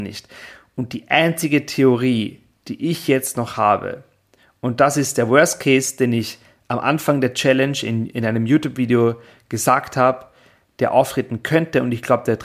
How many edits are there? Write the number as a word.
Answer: zero